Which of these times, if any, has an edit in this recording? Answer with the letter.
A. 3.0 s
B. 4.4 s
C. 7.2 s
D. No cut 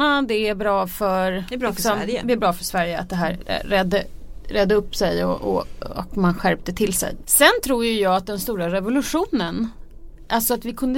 C